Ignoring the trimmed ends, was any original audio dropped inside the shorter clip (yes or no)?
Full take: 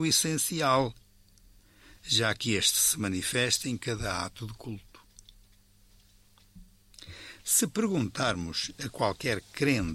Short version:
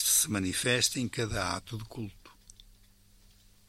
no